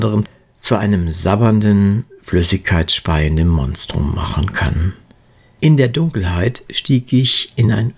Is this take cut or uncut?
cut